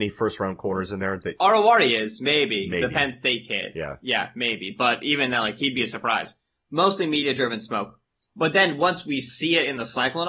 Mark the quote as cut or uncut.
uncut